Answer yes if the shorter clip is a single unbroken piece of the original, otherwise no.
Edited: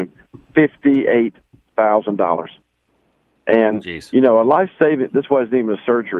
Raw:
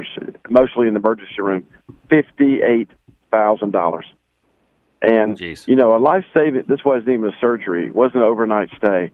yes